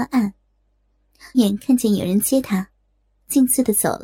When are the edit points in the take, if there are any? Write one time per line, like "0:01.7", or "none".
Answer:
0:01.3